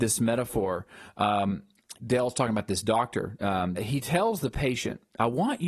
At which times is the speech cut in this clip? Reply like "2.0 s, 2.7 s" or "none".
1.9 s, 3.8 s

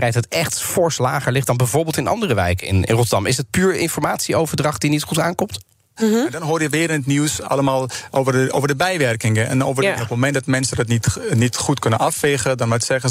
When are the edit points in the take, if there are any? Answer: 2.8 s, 6.0 s, 10.0 s

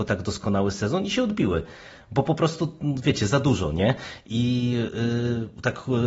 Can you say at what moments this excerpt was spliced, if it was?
none

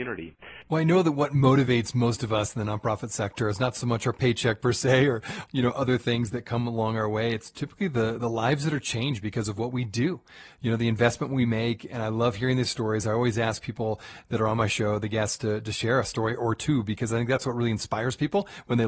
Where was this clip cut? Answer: 5.5 s

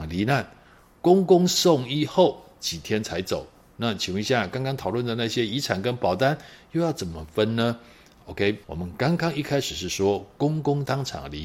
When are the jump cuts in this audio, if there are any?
none

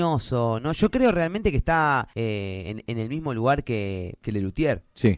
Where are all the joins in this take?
none

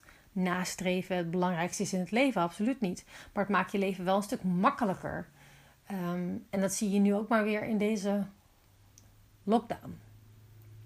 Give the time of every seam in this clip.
none

